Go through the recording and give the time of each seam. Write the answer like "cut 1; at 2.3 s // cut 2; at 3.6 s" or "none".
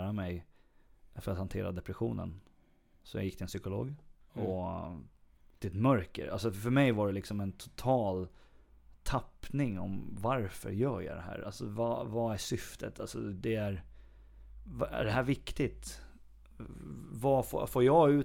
cut 1; at 4.3 s